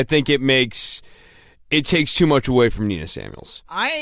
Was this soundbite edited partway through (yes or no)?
no